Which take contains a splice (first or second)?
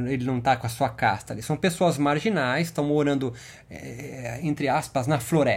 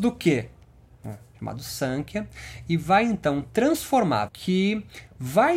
second